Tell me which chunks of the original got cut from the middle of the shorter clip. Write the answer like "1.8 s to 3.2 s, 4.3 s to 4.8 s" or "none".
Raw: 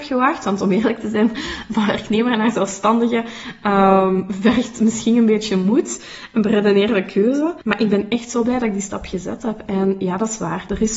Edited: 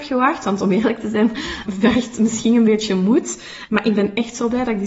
1.7 s to 4.3 s, 6.3 s to 7.6 s